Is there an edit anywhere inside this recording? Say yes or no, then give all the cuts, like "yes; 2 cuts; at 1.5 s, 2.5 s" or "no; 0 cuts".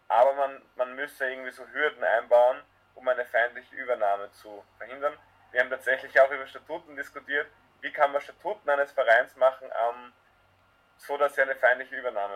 no; 0 cuts